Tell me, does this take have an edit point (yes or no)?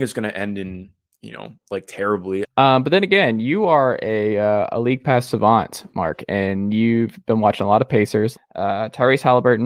yes